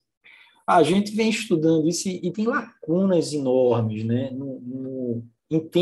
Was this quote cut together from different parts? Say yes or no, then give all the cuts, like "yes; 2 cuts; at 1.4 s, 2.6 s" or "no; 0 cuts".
yes; 1 cut; at 2.3 s